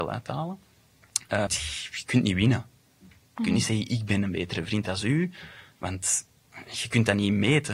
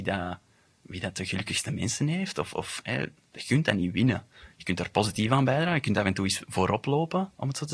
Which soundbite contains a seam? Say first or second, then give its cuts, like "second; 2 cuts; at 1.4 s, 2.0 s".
first; 1 cut; at 1.5 s